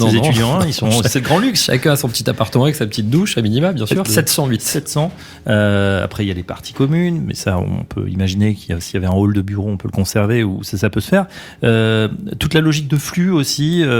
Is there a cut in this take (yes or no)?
yes